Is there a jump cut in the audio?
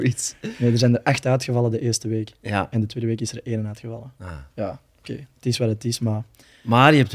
no; 0 cuts

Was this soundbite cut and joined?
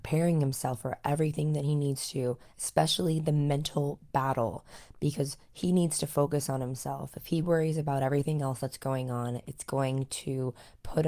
no; 0 cuts

